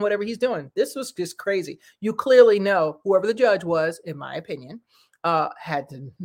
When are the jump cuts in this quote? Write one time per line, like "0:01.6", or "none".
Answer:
none